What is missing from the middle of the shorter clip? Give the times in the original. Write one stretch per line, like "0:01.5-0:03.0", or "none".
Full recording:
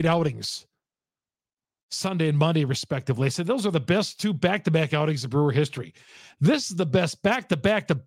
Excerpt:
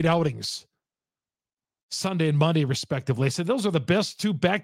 none